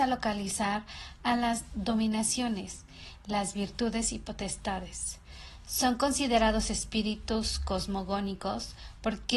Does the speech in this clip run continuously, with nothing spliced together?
yes; 0 cuts

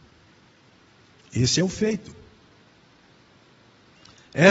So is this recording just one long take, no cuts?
yes; 0 cuts

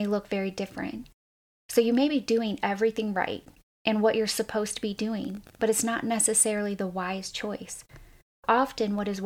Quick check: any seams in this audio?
no; 0 cuts

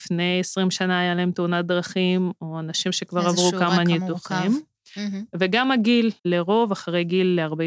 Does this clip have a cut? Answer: yes; 1 cut; at 6.2 s

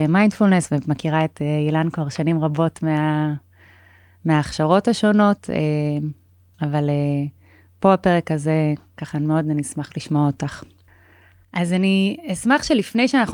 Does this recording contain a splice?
no; 0 cuts

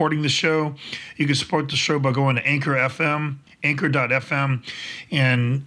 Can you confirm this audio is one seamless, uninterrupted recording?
yes; 0 cuts

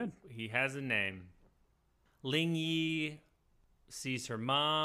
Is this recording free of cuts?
yes; 0 cuts

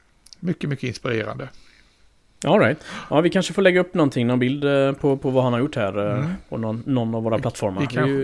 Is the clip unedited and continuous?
yes; 0 cuts

